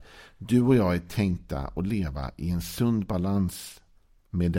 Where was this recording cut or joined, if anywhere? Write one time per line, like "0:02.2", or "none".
none